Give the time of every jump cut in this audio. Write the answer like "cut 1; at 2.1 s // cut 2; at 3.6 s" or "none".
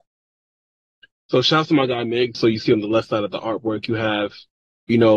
cut 1; at 2.3 s

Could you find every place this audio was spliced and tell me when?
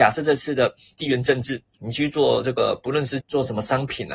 cut 1; at 1.7 s // cut 2; at 3.2 s

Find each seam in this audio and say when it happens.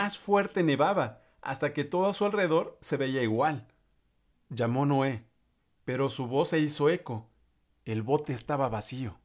cut 1; at 4.3 s

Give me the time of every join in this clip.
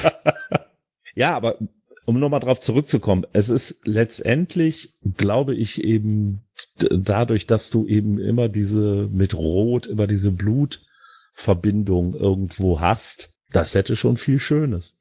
cut 1; at 13.3 s

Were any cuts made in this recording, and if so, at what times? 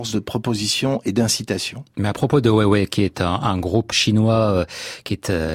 cut 1; at 3.9 s

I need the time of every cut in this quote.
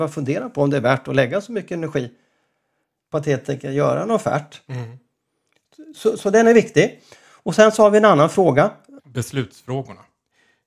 cut 1; at 4.7 s // cut 2; at 9.0 s

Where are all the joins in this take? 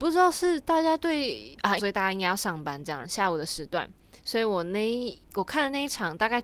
cut 1; at 1.8 s // cut 2; at 3.0 s

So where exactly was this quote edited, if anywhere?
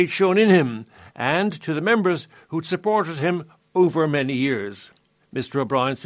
none

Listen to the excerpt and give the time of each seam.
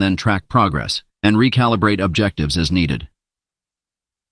cut 1; at 1.1 s

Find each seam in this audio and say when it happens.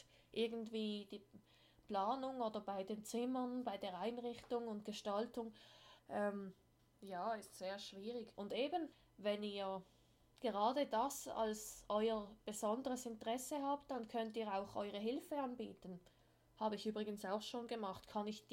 cut 1; at 6.0 s // cut 2; at 8.3 s

